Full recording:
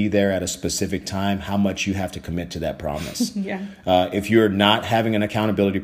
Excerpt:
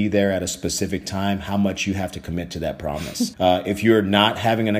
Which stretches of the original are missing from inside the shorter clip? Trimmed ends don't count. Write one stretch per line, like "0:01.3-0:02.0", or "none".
0:03.3-0:03.8